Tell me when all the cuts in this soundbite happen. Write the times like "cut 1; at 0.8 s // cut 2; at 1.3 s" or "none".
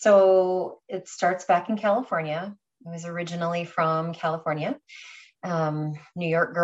none